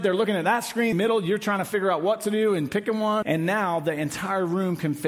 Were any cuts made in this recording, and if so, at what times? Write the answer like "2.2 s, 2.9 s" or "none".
0.9 s, 3.2 s